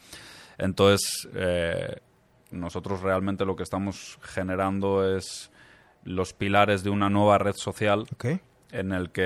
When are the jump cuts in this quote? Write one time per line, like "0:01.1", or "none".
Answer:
0:02.5